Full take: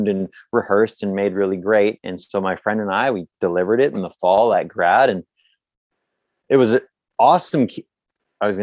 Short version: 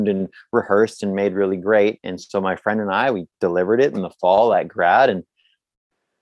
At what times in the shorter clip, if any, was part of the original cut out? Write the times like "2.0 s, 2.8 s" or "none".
none